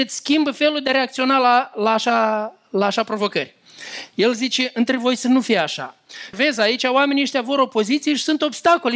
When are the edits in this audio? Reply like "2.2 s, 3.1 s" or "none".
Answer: 6.3 s

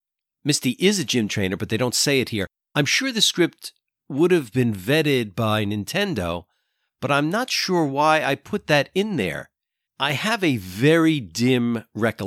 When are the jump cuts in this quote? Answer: 9.9 s

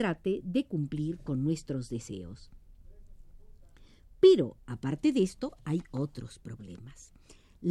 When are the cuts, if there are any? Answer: none

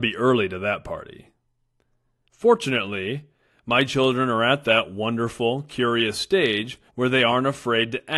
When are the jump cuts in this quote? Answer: 2.3 s, 6.9 s

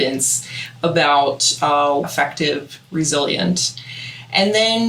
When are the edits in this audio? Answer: 2.0 s

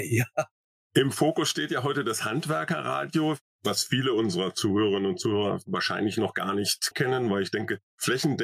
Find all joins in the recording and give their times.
6.9 s

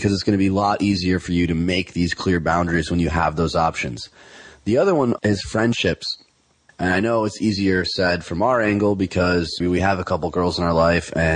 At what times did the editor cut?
5.2 s, 6.7 s, 9.6 s

